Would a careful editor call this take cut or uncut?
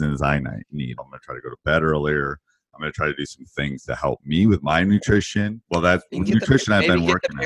cut